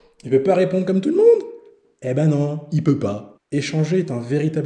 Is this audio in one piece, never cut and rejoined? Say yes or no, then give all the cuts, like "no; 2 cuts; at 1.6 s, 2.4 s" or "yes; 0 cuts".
no; 1 cut; at 3.4 s